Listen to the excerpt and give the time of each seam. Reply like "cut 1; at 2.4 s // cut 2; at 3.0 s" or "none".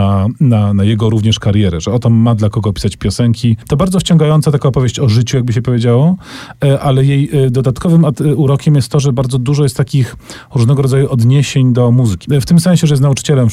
cut 1; at 12.2 s